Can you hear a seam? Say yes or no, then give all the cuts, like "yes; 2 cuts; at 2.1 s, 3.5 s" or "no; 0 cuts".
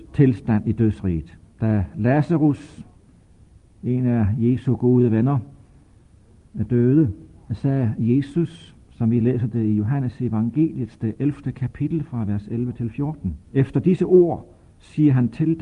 yes; 2 cuts; at 1.6 s, 13.4 s